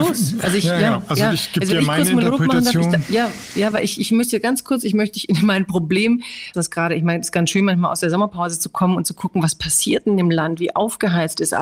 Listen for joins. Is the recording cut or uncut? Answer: cut